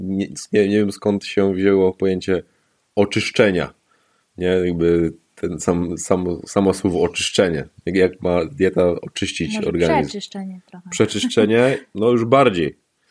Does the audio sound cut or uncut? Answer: uncut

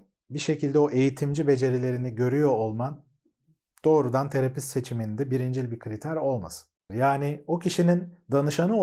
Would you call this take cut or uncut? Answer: cut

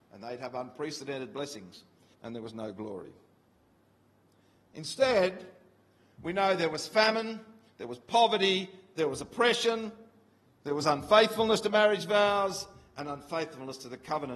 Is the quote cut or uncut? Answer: cut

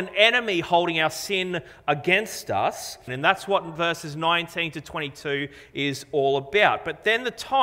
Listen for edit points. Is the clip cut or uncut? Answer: cut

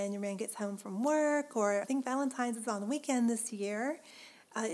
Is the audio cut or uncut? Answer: cut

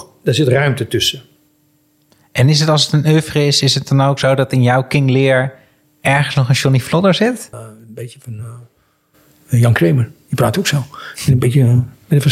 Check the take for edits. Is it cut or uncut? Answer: cut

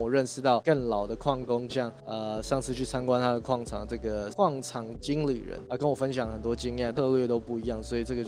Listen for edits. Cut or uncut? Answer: cut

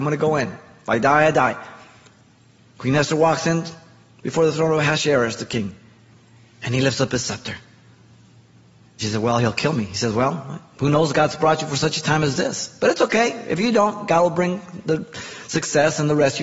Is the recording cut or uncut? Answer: cut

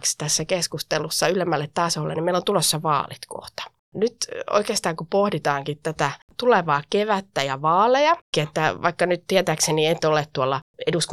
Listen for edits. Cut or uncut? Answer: cut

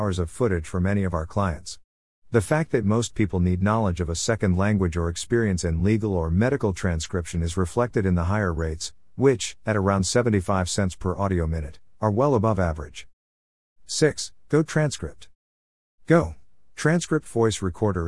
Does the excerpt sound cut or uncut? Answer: uncut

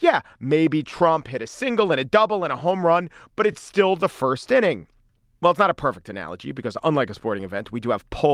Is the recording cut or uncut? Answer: uncut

